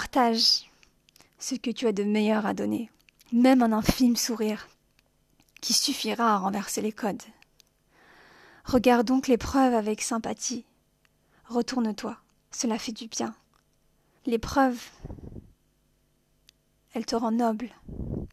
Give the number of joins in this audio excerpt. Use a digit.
1